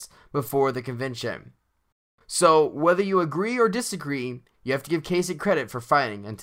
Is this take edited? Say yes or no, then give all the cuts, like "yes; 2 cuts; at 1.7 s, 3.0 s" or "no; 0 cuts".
no; 0 cuts